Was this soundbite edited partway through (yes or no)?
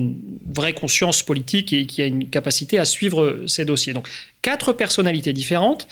no